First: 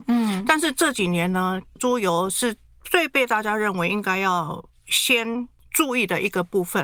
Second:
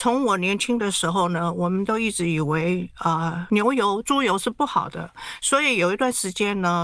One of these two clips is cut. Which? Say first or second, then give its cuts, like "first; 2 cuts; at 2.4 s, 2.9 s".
first; 1 cut; at 1.8 s